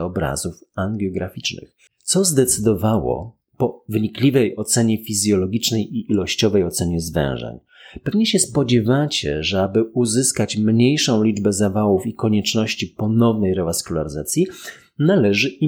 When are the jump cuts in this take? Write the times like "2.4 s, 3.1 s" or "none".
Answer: 1.9 s